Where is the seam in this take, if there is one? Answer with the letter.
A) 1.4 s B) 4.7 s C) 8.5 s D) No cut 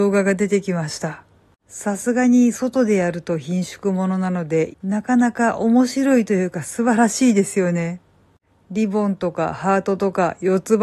B